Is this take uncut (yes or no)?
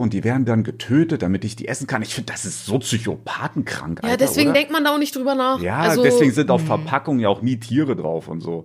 yes